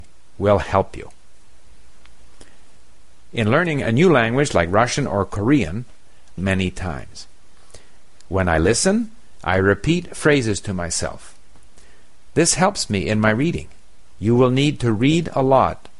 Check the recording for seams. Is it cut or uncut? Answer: cut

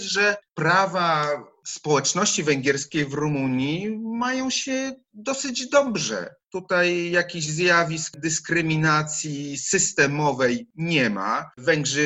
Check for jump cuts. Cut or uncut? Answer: uncut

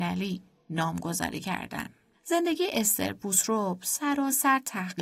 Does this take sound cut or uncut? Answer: uncut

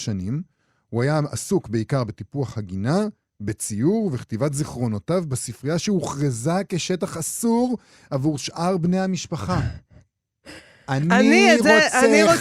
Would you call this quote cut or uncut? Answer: uncut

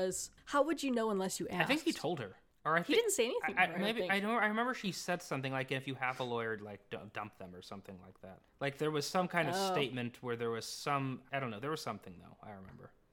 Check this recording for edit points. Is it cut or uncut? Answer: uncut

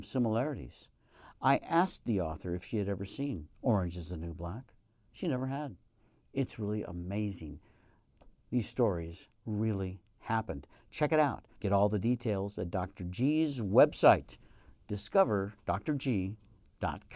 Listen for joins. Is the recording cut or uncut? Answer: cut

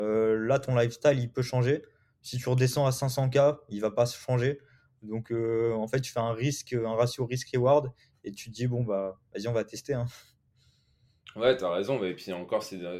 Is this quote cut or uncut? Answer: uncut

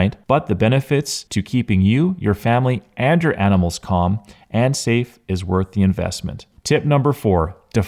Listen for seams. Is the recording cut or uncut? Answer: uncut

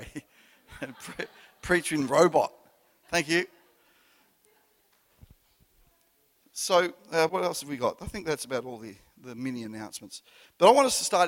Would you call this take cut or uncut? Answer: cut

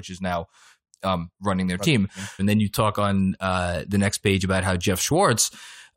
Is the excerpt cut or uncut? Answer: cut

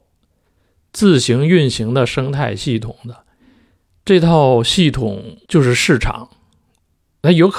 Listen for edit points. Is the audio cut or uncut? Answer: cut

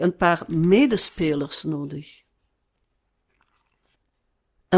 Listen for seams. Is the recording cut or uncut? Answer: uncut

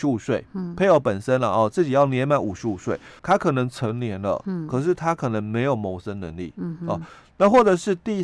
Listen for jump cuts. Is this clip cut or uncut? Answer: cut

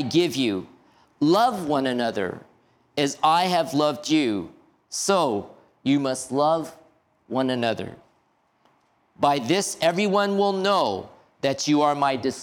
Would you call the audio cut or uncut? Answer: uncut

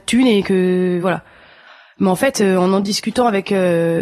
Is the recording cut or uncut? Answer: uncut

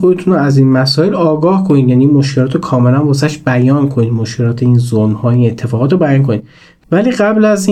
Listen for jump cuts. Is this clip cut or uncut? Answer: uncut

